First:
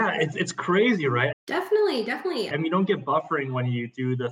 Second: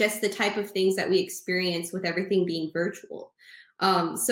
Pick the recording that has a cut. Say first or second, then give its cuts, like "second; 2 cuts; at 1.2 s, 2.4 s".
first; 2 cuts; at 1.3 s, 2.5 s